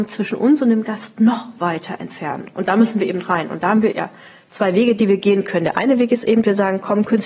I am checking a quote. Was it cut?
yes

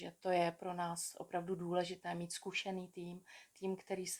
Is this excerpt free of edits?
yes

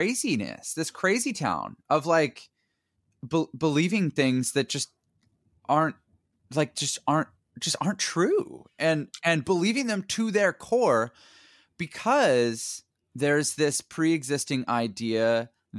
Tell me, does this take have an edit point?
no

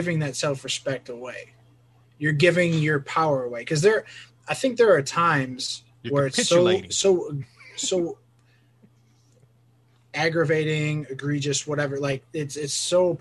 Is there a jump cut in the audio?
no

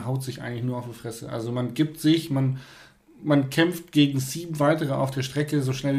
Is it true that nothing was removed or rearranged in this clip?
yes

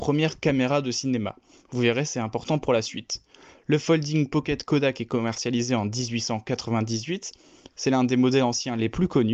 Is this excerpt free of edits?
yes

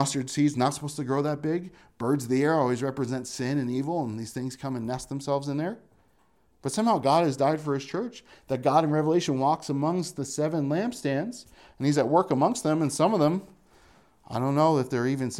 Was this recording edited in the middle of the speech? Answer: no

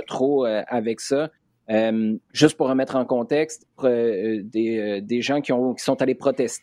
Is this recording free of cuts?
no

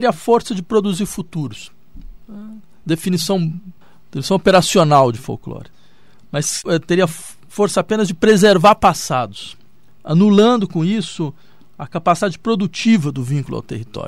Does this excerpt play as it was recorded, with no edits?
yes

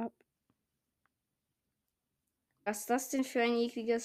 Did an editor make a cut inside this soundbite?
yes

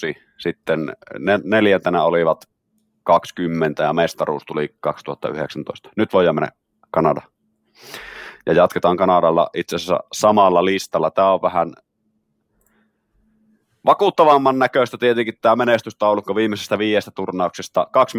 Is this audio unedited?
yes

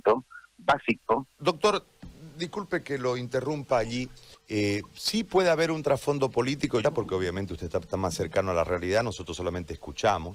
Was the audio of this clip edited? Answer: yes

